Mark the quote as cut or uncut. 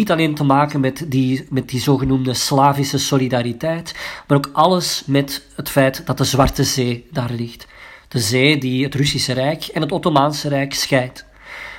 uncut